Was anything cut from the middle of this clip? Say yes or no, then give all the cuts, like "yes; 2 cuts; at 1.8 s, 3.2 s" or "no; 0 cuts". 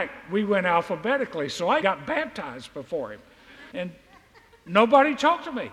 yes; 2 cuts; at 1.8 s, 3.7 s